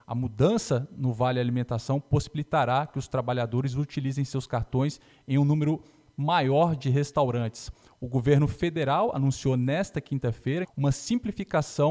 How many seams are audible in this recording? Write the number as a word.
one